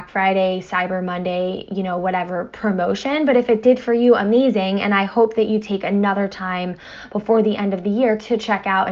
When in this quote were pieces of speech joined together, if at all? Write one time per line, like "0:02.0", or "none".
none